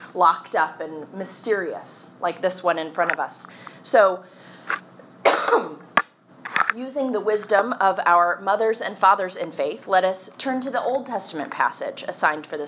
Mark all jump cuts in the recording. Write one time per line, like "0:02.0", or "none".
none

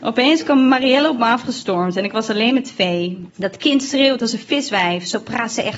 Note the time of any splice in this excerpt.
0:03.3

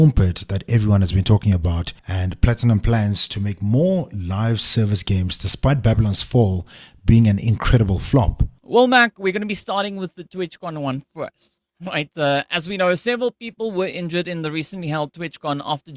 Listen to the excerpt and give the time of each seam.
0:02.0

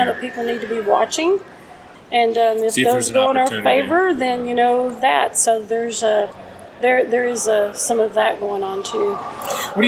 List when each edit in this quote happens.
0:01.9

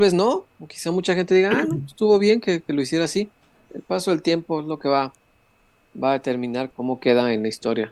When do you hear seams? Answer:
0:06.7

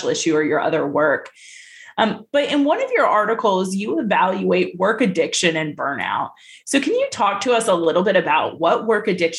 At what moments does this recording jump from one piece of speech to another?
none

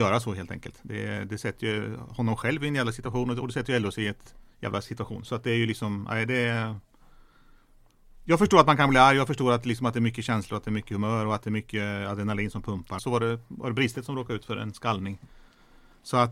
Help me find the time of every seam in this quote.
0:04.5
0:13.0

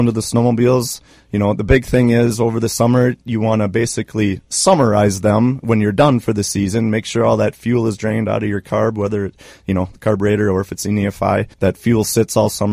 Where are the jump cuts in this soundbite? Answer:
0:11.5

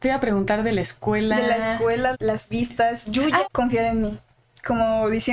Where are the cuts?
0:02.1
0:03.4

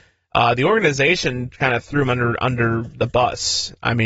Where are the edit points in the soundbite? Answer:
none

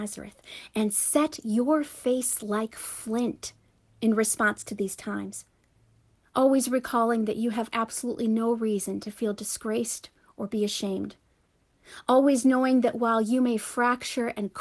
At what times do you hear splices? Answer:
0:06.2

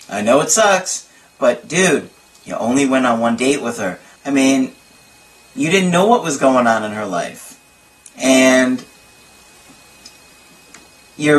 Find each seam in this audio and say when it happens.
0:04.2

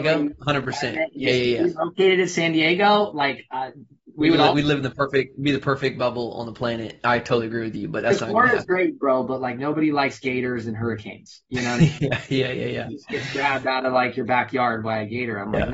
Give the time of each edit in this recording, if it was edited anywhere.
0:12.9

